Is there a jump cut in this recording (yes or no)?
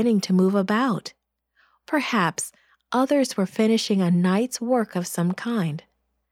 no